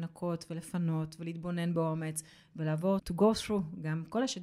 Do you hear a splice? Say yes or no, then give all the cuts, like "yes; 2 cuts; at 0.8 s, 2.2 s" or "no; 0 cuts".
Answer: yes; 1 cut; at 3.0 s